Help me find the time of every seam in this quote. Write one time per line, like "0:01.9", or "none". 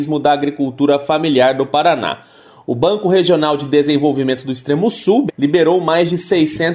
0:05.3

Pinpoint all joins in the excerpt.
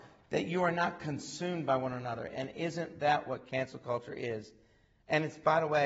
none

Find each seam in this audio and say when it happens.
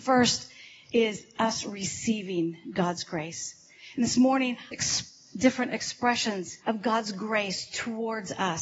0:04.7
0:06.6

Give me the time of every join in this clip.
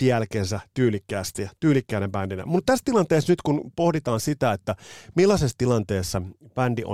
0:02.5

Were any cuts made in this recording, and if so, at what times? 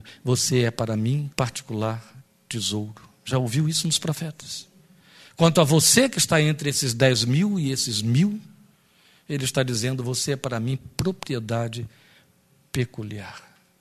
0:01.3

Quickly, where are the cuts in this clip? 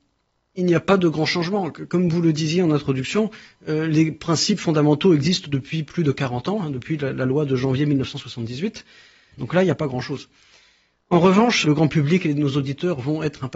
0:09.3
0:11.6

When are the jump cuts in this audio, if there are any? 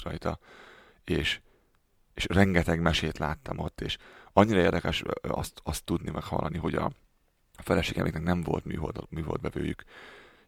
none

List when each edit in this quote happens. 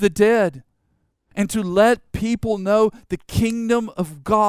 0:01.3

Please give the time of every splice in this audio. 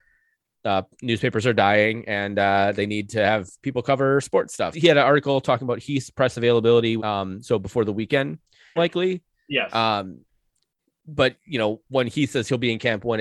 0:04.7
0:07.0
0:08.8

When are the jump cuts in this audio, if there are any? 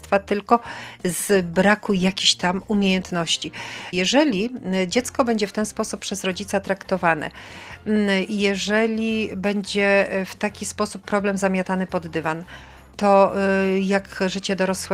0:03.9

